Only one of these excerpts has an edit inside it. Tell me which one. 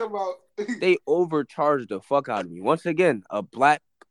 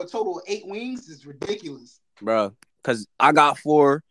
second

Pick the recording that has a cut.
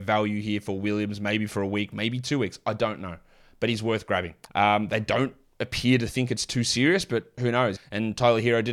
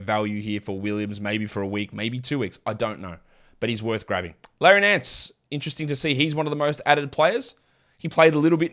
first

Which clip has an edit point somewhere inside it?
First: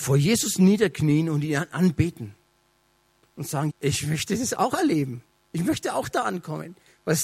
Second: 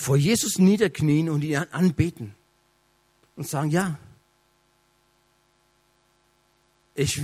first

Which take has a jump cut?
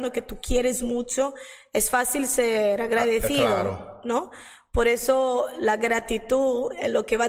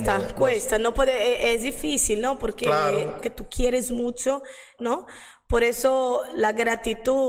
second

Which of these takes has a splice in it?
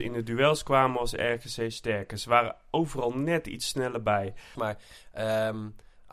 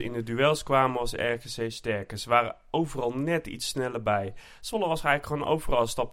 first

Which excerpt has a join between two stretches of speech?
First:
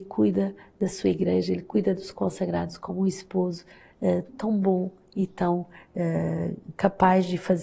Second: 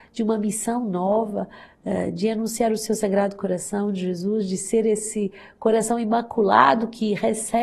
first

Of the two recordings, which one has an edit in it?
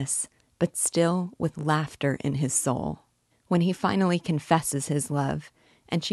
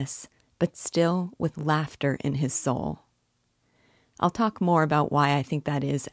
first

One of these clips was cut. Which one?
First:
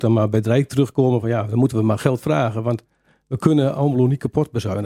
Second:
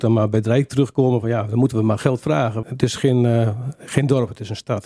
second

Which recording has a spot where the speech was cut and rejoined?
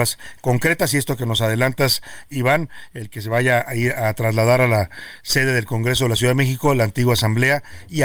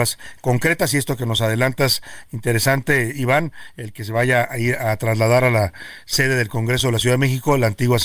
first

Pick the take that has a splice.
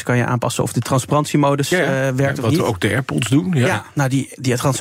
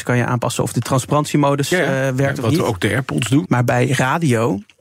second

